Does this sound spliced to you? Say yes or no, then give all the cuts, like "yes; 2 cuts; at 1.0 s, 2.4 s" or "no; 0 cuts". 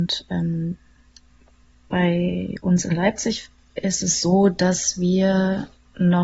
no; 0 cuts